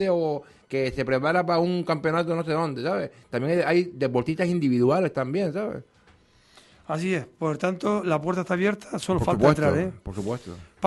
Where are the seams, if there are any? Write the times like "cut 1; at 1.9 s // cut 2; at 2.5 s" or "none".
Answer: none